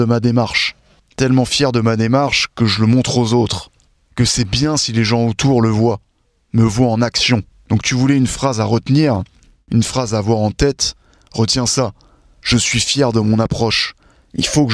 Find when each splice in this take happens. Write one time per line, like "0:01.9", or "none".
0:07.5